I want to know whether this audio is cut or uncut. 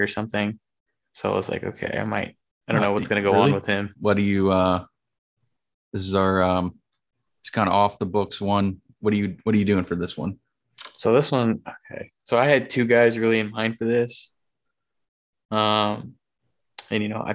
cut